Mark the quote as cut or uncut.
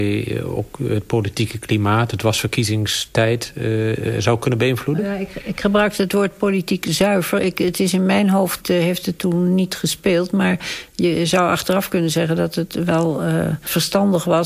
uncut